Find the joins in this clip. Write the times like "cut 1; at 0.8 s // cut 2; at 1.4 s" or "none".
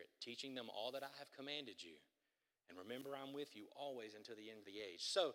none